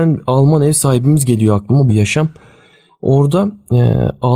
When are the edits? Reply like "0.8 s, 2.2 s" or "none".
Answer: 1.9 s